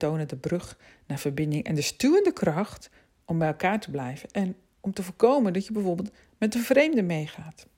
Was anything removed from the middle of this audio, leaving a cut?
no; 0 cuts

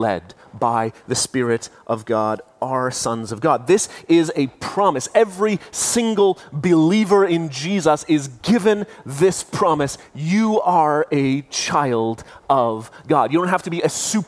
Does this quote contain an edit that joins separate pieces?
no; 0 cuts

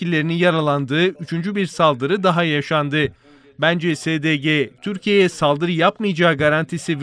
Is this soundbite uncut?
yes; 0 cuts

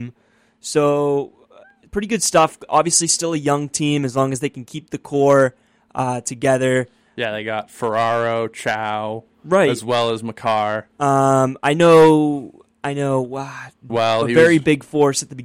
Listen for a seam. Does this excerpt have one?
yes; 2 cuts; at 12.7 s, 13.9 s

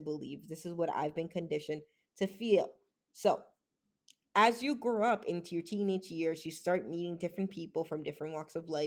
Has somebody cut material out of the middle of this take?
no; 0 cuts

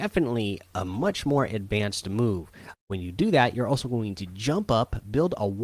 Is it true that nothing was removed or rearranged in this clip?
no; 1 cut; at 2.7 s

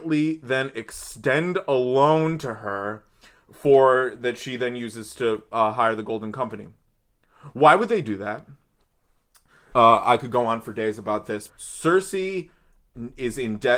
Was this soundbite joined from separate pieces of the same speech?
yes; 2 cuts; at 9.7 s, 11.5 s

